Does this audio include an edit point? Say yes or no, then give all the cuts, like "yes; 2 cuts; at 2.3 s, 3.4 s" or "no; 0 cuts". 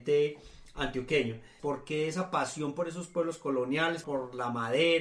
yes; 2 cuts; at 1.6 s, 4.0 s